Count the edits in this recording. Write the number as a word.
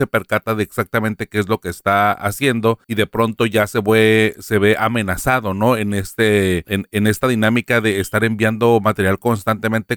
zero